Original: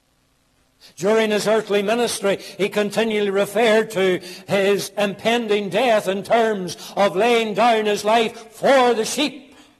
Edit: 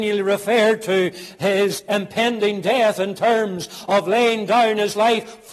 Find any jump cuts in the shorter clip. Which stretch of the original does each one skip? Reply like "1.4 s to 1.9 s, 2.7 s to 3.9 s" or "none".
none